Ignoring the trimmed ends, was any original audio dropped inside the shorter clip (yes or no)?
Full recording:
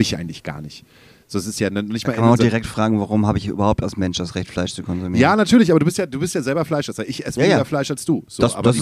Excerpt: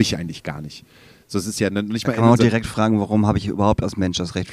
no